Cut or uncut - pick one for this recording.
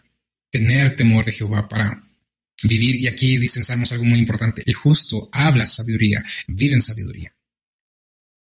cut